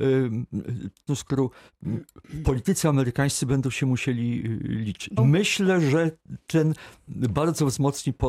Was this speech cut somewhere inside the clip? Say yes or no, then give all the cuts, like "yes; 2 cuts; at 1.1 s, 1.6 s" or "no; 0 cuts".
yes; 2 cuts; at 1.1 s, 5.2 s